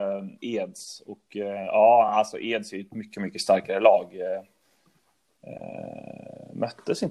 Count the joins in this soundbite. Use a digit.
0